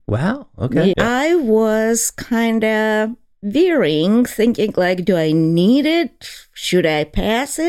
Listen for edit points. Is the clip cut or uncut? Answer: cut